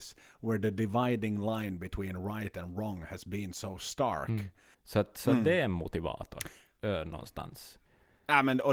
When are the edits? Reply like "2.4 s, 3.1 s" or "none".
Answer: 4.7 s